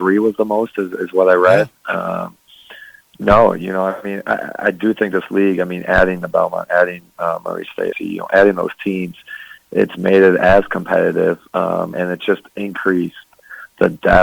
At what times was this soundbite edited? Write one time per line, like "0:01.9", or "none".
0:07.9
0:11.9